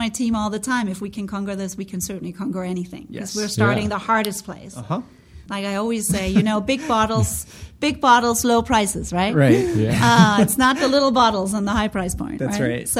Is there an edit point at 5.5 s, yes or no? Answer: yes